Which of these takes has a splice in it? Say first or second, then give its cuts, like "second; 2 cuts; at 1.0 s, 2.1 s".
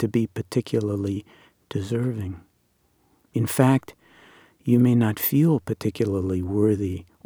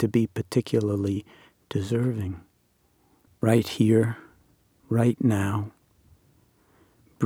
second; 1 cut; at 3.3 s